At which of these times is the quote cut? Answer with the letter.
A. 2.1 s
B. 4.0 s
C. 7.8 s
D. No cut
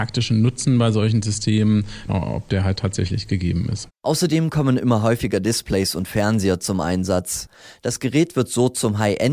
A